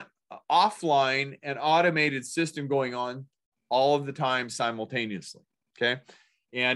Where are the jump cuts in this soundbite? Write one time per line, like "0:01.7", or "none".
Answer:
none